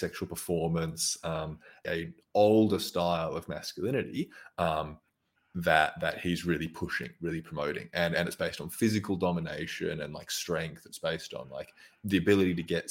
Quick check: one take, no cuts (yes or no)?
no